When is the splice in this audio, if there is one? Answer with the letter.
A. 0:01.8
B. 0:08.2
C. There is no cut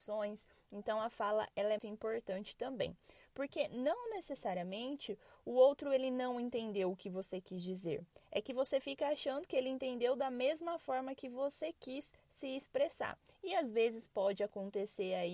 A